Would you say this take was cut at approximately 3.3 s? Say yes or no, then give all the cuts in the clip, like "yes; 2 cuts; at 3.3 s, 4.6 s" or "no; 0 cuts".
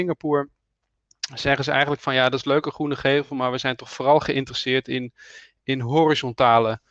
no; 0 cuts